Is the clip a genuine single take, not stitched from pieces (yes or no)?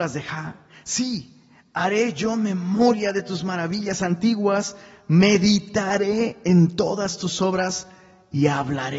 yes